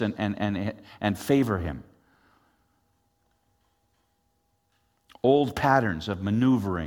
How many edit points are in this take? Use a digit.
0